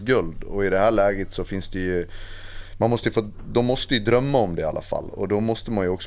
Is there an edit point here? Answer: no; 0 cuts

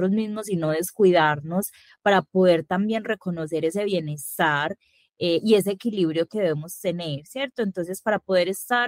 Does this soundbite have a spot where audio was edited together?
no; 0 cuts

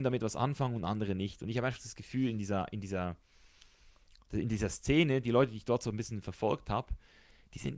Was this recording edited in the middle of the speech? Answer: no; 0 cuts

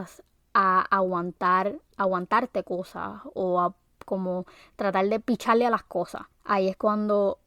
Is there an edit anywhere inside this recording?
yes; 1 cut; at 6.3 s

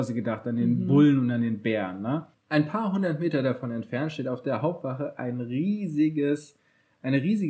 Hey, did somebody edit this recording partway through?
yes; 1 cut; at 2.3 s

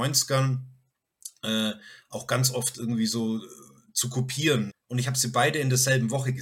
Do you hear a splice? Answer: yes; 1 cut; at 4.7 s

